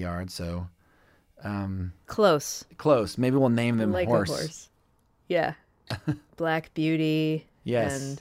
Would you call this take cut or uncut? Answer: uncut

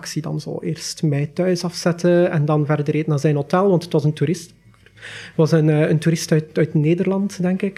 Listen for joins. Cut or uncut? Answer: uncut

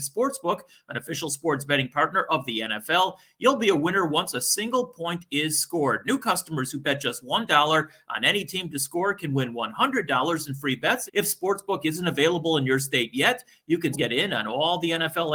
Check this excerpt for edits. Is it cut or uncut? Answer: cut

